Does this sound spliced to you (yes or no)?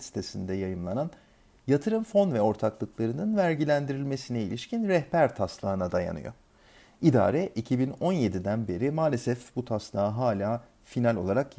no